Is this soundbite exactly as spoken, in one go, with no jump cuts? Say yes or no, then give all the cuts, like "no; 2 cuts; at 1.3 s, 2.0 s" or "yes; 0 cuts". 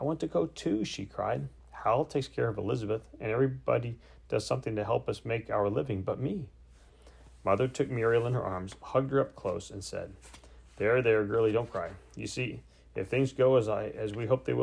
yes; 0 cuts